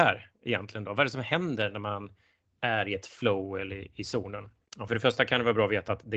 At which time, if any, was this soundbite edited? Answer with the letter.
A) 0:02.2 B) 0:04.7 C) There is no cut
C